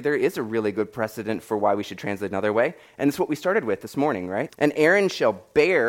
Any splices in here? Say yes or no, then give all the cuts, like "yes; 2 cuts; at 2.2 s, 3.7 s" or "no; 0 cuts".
yes; 1 cut; at 4.5 s